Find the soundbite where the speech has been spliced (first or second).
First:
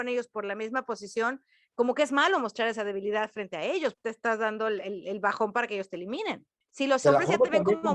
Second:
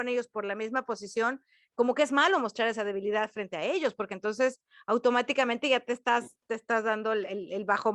first